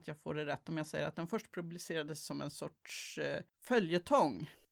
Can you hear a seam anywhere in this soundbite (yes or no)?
yes